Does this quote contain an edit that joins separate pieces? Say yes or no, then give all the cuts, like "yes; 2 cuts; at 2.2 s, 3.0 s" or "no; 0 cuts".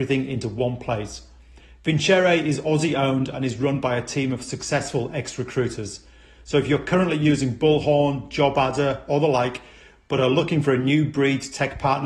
no; 0 cuts